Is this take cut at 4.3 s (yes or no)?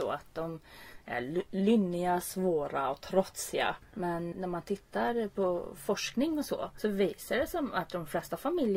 yes